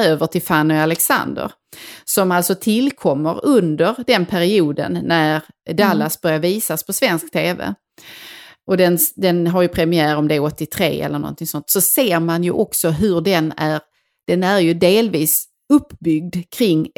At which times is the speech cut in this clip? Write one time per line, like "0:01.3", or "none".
none